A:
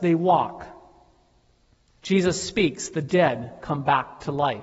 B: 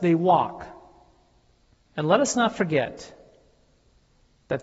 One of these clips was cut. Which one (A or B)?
B